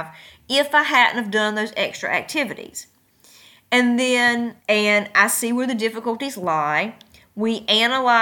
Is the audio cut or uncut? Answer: cut